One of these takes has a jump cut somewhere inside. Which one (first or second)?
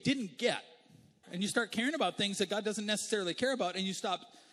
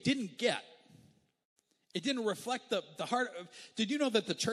first